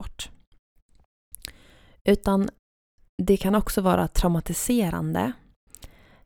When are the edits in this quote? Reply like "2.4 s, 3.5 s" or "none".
none